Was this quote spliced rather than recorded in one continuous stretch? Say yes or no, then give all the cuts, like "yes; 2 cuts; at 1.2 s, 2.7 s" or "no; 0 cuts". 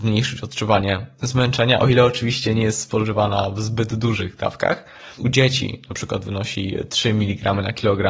yes; 1 cut; at 5.2 s